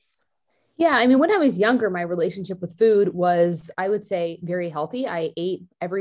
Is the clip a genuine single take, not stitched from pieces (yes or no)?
yes